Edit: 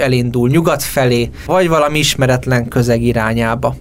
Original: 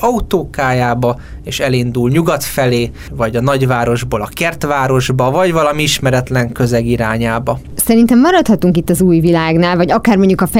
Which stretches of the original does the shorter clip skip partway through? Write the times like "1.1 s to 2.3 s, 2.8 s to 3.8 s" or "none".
3.1 s to 5.3 s